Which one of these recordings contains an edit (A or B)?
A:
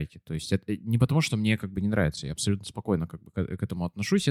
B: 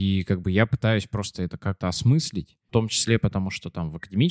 B